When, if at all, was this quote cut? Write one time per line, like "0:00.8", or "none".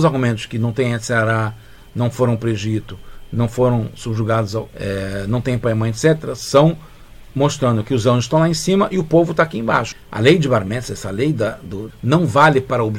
0:04.7
0:09.9
0:11.9